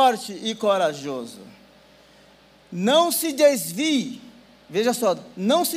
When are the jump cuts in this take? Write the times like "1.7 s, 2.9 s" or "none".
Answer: none